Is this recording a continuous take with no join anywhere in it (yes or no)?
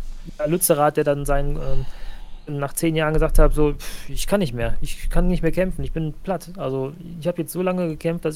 yes